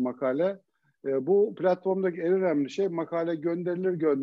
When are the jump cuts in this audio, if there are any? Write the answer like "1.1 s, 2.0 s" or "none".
none